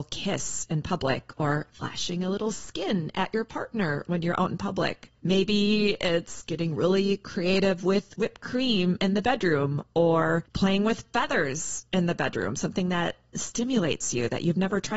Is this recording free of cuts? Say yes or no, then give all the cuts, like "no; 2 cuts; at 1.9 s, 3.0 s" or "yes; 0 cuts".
yes; 0 cuts